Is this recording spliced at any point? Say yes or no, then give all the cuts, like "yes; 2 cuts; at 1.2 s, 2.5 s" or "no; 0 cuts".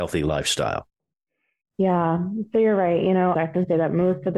yes; 1 cut; at 3.3 s